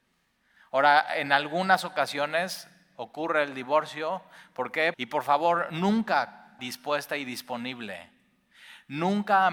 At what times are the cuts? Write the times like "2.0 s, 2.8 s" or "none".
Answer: 4.9 s, 6.6 s